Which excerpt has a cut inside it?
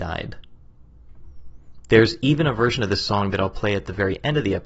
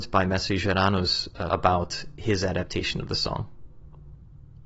second; 1 cut; at 1.5 s

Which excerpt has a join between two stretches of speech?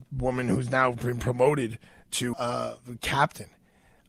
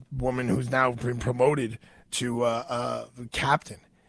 first; 1 cut; at 2.3 s

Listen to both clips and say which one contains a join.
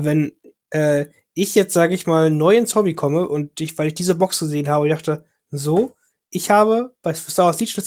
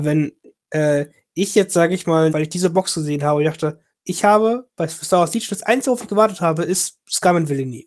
second; 2 cuts; at 2.3 s, 3.9 s

